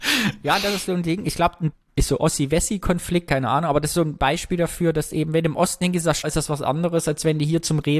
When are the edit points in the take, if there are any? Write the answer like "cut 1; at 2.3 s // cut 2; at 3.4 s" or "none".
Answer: cut 1; at 1.7 s // cut 2; at 6.2 s